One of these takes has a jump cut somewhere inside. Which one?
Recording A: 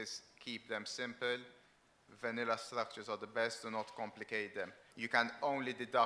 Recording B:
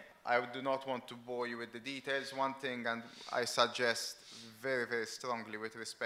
A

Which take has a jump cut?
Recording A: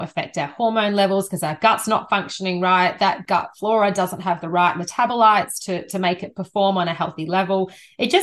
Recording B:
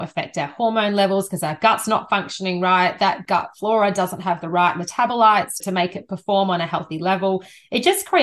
B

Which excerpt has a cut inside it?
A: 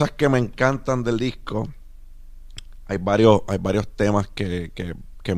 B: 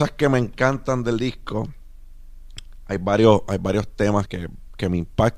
B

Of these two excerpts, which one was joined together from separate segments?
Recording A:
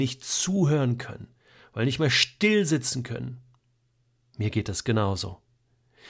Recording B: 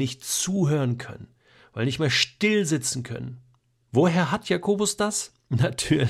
B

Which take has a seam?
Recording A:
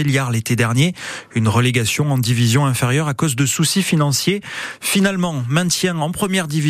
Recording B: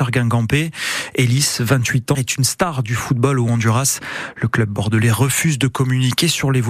B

